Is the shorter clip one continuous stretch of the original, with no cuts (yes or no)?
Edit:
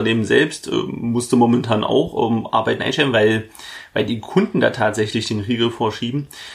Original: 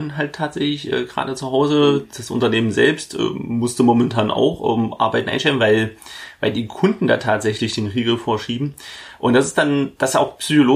yes